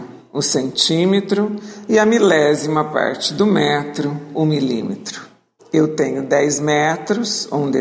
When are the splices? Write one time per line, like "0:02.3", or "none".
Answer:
0:05.6